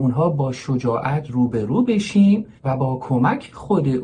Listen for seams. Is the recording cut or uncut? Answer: cut